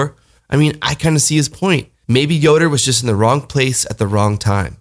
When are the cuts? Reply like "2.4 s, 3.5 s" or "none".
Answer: none